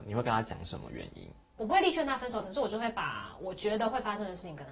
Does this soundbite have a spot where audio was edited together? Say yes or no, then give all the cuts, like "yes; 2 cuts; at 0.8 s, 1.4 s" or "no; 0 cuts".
no; 0 cuts